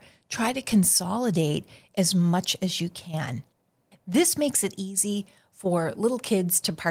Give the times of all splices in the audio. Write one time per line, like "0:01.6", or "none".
none